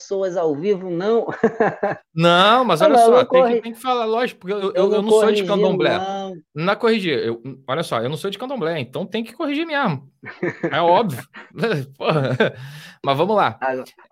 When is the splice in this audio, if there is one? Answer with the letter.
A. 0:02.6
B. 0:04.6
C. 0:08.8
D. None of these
D